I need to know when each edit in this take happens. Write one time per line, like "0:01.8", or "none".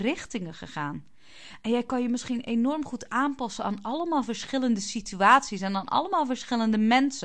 none